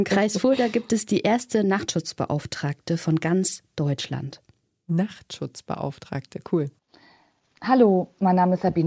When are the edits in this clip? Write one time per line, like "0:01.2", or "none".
none